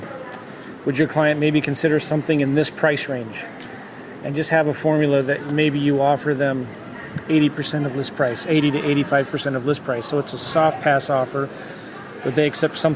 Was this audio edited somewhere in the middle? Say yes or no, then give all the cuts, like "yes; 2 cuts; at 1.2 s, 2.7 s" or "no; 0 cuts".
no; 0 cuts